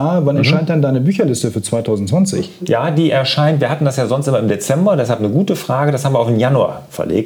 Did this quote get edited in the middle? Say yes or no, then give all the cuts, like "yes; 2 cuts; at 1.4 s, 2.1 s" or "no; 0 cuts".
no; 0 cuts